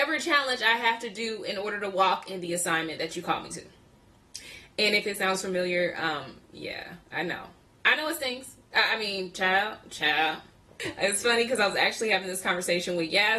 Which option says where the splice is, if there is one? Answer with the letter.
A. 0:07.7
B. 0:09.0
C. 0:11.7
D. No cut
D